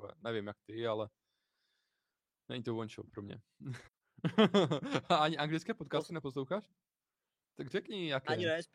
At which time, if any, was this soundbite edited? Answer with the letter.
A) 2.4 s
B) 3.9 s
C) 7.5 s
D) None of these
B